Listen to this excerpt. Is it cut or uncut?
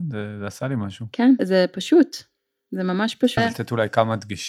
cut